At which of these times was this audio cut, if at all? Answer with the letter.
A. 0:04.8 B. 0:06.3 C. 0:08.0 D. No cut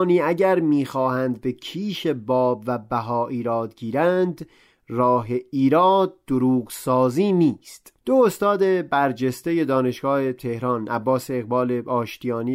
C